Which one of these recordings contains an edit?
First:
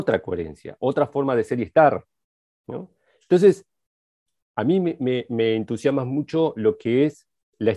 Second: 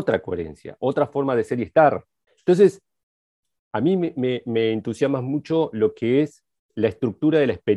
second; 1 cut; at 2.3 s

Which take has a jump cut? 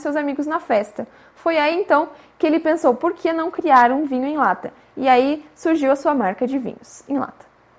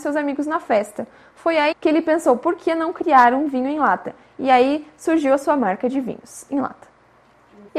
second; 1 cut; at 1.7 s

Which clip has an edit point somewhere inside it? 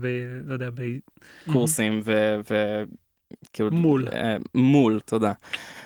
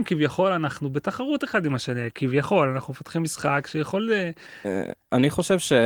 first; 1 cut; at 1.5 s

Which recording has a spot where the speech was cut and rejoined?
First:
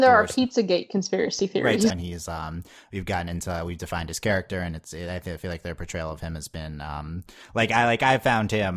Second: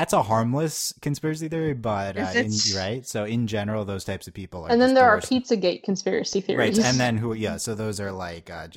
first; 1 cut; at 1.9 s

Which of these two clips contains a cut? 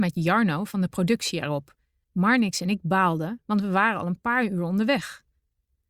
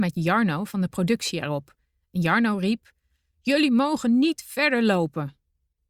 first; 1 cut; at 2.0 s

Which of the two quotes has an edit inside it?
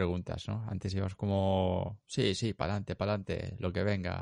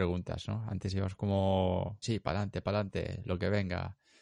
second; 1 cut; at 2.0 s

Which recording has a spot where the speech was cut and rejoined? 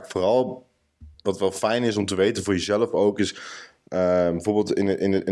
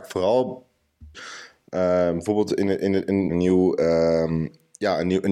second; 2 cuts; at 1.1 s, 3.3 s

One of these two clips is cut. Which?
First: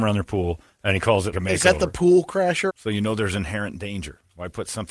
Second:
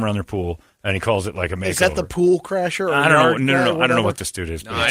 first; 2 cuts; at 1.3 s, 2.7 s

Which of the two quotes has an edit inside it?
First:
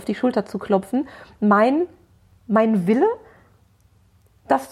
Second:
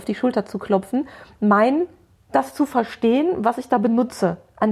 second; 1 cut; at 2.2 s

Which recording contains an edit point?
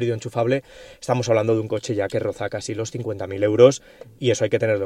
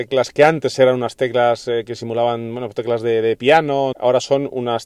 second; 1 cut; at 3.9 s

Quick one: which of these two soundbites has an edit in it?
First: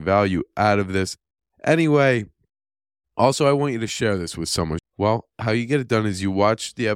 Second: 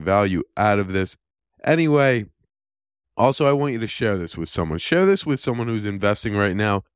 first; 1 cut; at 4.8 s

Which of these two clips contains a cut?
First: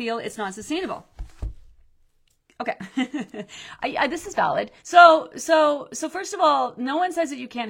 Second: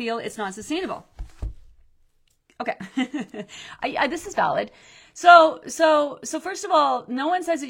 first; 1 cut; at 4.8 s

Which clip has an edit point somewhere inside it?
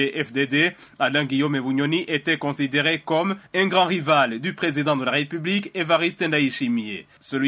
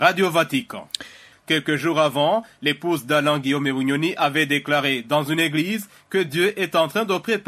second; 1 cut; at 1.3 s

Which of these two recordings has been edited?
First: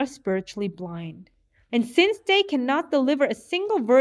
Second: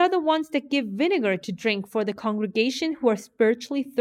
first; 1 cut; at 1.7 s

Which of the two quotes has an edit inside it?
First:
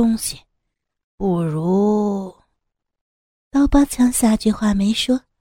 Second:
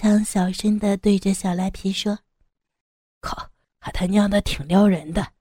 second; 1 cut; at 3.6 s

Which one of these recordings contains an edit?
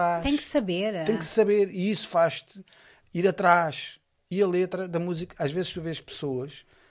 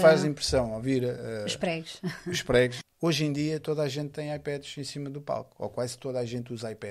second; 1 cut; at 2.8 s

